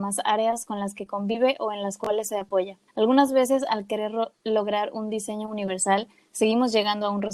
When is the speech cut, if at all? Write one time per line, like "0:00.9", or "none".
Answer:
0:02.9